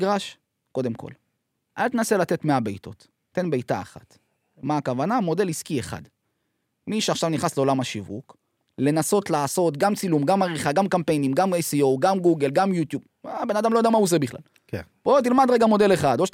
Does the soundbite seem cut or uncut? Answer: uncut